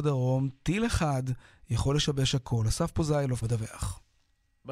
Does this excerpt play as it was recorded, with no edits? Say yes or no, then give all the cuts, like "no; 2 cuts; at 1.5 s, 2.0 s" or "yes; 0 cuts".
no; 1 cut; at 3.4 s